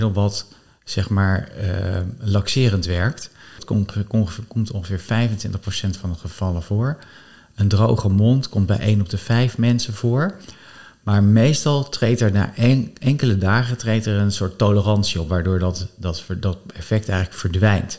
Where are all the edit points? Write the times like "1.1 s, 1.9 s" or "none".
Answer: 3.6 s